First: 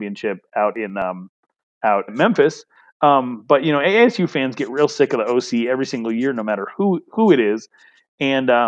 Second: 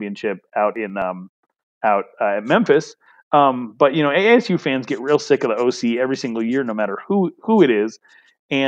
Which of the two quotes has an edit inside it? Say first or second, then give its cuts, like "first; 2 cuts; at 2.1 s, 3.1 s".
first; 1 cut; at 2.1 s